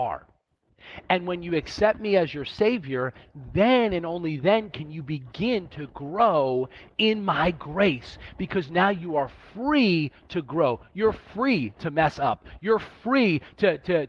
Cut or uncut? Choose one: cut